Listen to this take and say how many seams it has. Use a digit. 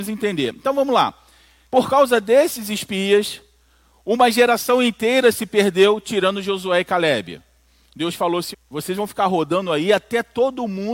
2